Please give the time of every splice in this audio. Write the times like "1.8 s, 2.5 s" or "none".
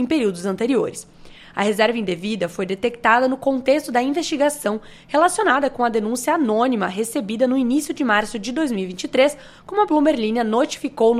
none